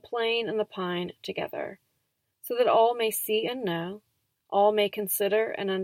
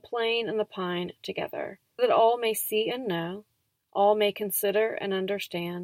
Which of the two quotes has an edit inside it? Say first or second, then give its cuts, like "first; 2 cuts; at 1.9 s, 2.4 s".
second; 1 cut; at 2.0 s